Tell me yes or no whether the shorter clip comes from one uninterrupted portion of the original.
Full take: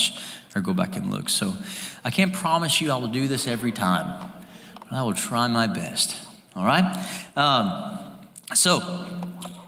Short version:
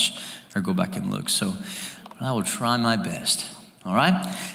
no